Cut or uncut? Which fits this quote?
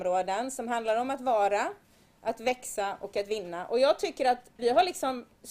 cut